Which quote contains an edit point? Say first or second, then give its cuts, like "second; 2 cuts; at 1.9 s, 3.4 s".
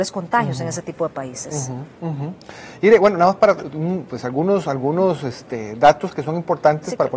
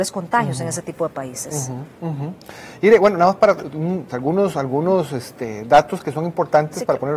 second; 1 cut; at 4.1 s